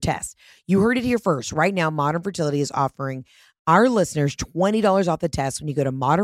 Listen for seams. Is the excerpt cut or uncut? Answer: uncut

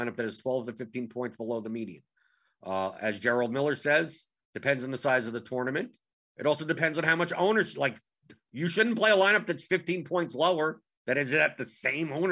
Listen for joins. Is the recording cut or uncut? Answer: uncut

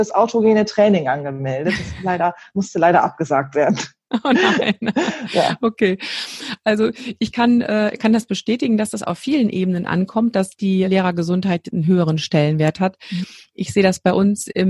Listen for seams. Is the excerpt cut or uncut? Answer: cut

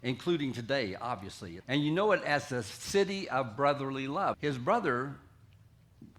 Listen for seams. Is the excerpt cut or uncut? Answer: cut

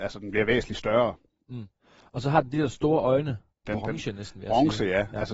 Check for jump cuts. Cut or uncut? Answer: cut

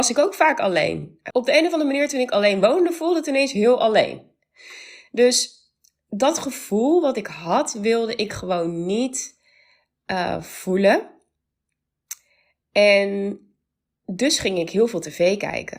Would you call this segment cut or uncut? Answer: uncut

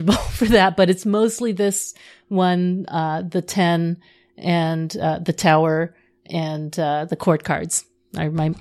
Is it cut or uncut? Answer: uncut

